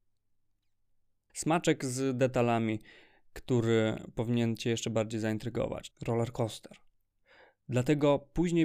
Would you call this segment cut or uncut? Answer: cut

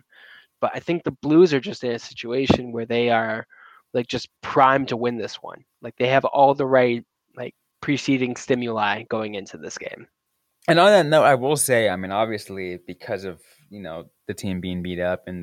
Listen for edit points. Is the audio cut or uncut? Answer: uncut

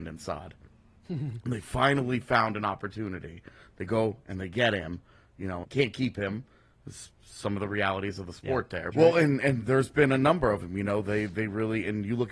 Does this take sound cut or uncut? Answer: cut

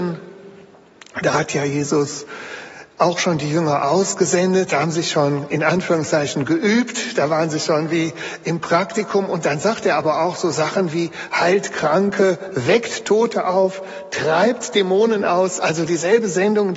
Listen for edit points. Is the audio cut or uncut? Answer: uncut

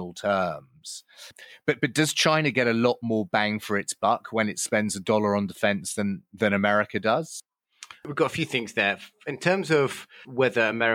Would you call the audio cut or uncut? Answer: uncut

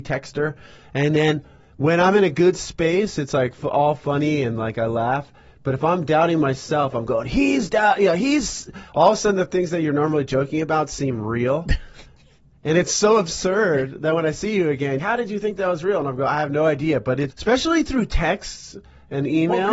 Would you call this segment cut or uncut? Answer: cut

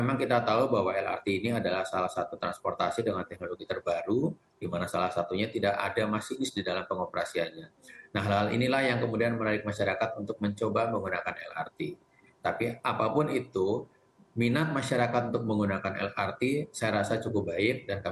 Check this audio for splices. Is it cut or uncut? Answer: uncut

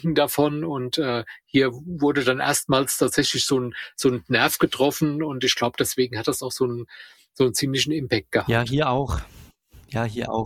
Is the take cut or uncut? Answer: uncut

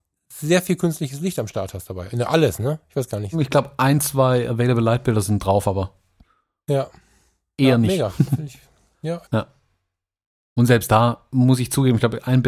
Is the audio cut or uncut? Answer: cut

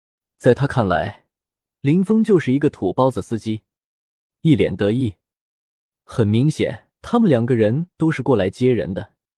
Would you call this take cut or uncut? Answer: cut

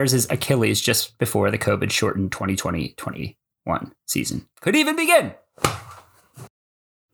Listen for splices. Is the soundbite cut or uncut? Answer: cut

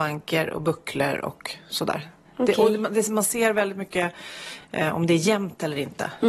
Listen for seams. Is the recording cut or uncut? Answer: uncut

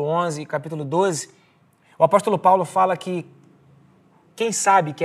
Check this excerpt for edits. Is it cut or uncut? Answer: uncut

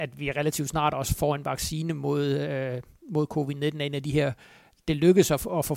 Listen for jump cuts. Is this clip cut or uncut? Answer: uncut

